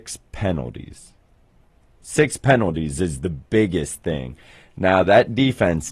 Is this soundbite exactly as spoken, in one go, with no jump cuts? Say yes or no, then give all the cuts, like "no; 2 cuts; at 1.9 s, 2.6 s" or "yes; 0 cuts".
yes; 0 cuts